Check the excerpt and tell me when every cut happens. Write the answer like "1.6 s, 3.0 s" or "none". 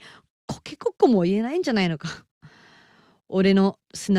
none